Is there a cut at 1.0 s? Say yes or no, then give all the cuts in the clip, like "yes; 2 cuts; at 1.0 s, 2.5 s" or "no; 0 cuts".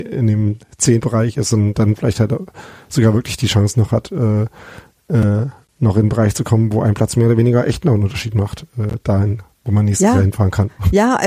yes; 1 cut; at 1.0 s